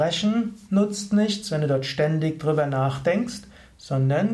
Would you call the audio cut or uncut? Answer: uncut